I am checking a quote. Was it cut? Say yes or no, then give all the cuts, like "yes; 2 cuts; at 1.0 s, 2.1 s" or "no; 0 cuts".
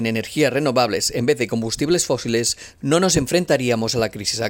no; 0 cuts